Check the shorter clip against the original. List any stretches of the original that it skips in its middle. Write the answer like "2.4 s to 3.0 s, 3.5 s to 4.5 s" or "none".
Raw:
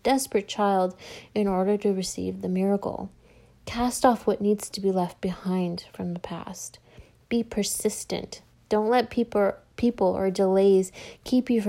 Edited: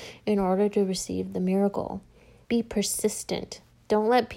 3.5 s to 7.3 s